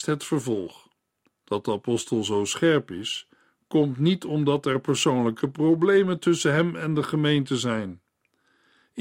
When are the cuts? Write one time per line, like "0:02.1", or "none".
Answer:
0:01.3